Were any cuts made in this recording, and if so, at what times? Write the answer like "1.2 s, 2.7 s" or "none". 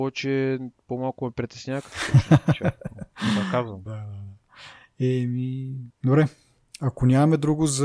3.9 s, 6.0 s